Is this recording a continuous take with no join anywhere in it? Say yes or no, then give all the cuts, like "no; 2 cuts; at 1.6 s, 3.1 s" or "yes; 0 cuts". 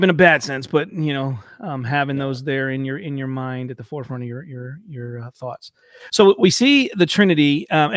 yes; 0 cuts